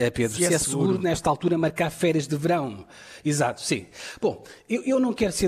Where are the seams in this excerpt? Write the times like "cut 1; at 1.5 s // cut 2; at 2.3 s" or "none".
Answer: none